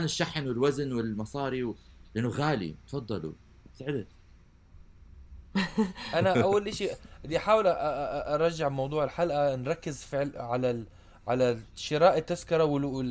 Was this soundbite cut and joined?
no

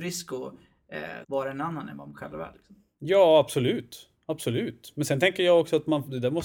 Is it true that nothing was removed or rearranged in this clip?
no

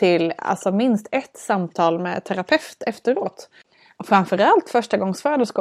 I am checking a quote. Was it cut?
no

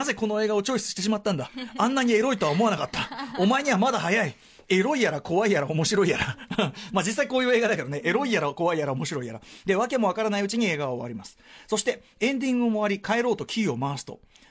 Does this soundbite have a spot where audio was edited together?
no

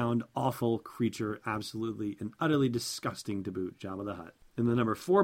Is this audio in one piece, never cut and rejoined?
yes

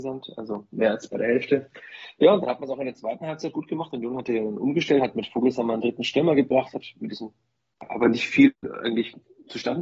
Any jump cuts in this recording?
no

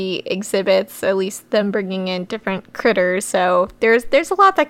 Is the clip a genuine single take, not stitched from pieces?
yes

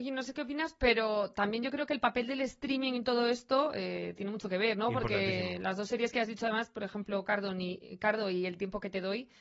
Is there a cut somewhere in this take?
no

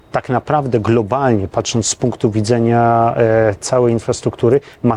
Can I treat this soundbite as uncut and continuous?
no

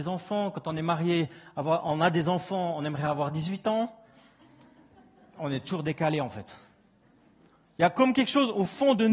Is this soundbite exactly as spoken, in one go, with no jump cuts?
yes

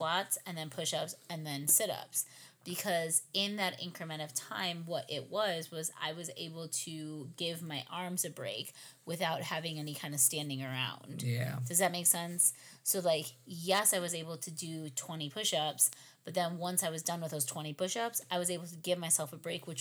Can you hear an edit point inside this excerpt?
no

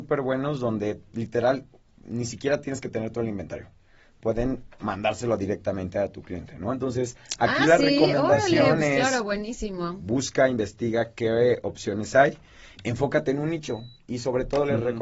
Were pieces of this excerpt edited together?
yes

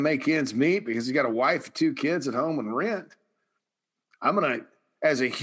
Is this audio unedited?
yes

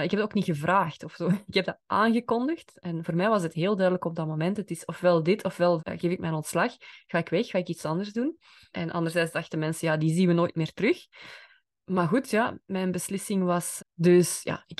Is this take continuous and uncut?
no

